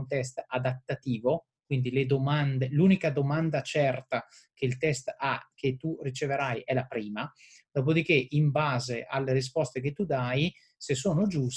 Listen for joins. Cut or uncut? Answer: uncut